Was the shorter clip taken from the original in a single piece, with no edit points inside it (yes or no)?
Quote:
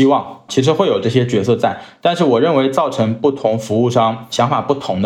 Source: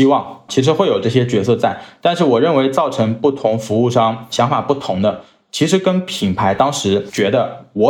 yes